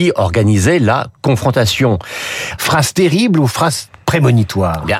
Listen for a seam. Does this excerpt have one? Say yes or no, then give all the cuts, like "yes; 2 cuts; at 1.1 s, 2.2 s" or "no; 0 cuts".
yes; 1 cut; at 2.6 s